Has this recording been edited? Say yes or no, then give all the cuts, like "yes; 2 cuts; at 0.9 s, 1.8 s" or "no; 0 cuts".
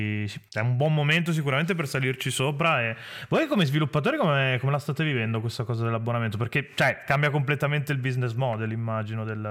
no; 0 cuts